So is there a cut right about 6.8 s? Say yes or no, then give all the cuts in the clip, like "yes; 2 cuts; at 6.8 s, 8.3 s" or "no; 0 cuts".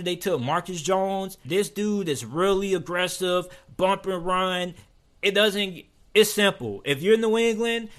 no; 1 cut; at 1.4 s